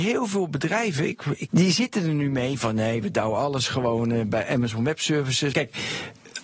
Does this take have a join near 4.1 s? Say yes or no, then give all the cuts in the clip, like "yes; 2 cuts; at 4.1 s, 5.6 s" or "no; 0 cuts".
no; 2 cuts; at 1.5 s, 5.5 s